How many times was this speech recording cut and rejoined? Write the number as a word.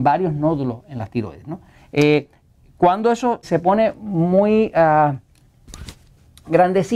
one